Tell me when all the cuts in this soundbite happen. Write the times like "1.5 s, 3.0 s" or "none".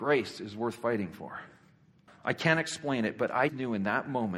2.1 s, 3.5 s